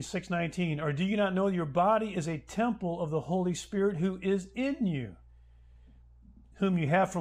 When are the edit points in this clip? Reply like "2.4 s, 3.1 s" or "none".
none